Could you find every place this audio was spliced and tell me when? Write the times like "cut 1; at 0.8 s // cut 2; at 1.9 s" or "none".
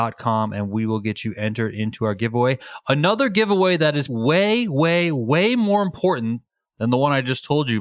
cut 1; at 4.1 s